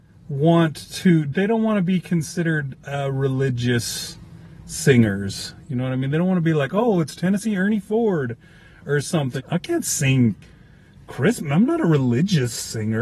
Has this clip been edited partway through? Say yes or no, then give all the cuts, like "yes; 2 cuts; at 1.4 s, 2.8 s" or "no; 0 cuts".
yes; 1 cut; at 9.4 s